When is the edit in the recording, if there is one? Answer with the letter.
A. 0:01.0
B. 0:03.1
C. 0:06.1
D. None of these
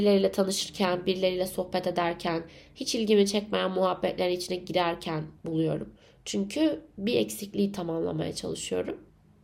D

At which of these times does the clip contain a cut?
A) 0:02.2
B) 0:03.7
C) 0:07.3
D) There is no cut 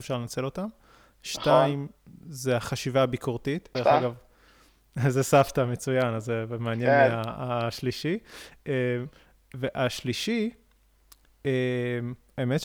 B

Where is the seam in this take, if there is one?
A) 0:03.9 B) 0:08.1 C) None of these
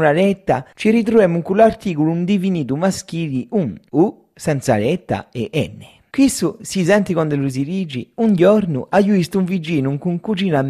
C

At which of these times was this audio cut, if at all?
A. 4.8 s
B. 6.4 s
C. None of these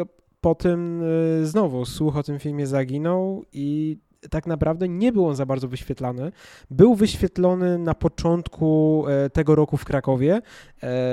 C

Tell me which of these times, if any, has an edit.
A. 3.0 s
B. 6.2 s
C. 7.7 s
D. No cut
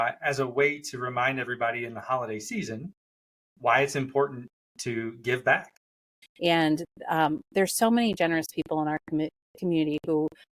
B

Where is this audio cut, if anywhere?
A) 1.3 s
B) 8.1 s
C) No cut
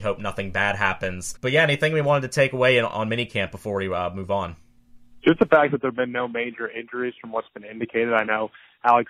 A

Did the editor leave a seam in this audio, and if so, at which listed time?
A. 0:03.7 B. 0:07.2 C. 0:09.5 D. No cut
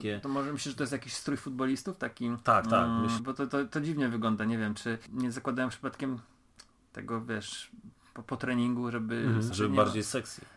C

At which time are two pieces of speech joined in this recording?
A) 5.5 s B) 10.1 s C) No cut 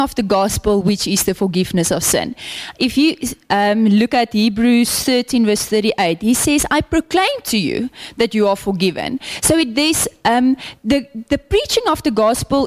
C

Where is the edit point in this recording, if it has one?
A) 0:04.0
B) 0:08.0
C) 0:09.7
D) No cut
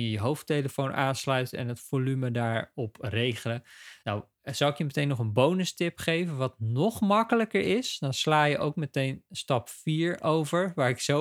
A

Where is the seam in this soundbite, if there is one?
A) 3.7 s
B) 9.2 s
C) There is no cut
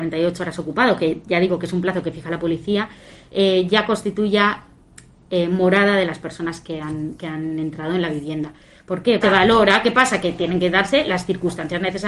B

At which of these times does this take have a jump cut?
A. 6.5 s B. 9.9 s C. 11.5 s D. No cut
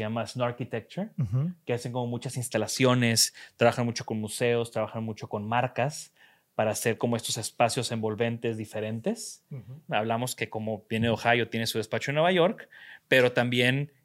B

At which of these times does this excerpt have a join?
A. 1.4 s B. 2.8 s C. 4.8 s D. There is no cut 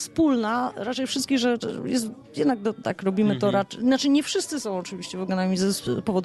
B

